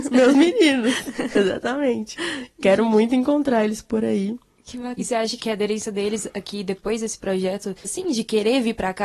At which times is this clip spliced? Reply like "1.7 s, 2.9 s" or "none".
5.0 s, 7.8 s

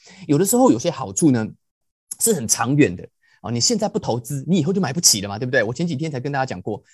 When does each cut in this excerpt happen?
none

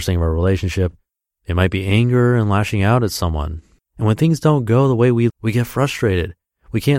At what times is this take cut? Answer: 3.8 s, 5.3 s

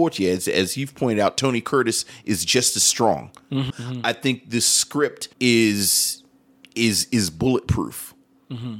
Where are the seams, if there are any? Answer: 3.7 s, 5.3 s

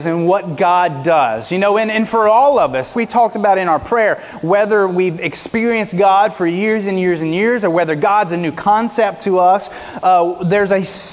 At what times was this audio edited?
2.9 s

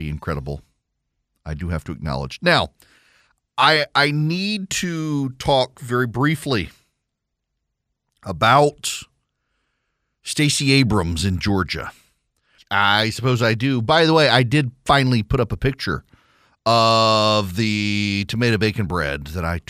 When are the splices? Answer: 12.6 s

